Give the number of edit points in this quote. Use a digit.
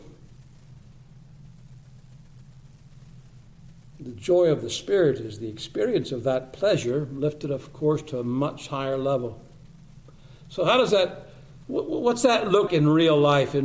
1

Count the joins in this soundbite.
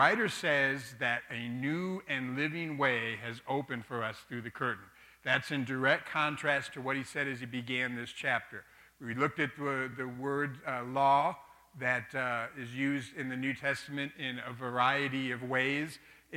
0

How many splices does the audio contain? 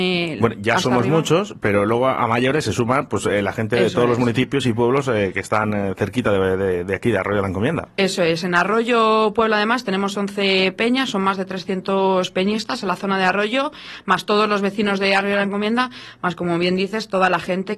0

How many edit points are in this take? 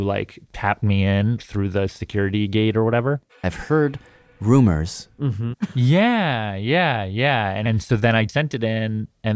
2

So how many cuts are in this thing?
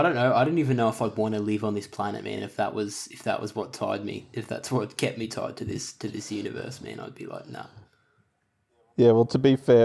0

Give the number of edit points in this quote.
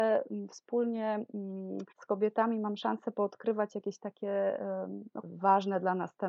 2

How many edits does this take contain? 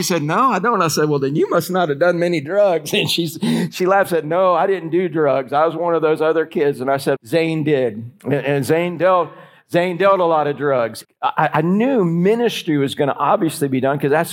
2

